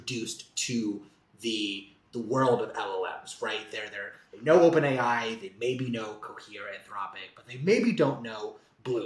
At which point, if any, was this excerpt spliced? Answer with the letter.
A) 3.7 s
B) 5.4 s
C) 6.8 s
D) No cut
D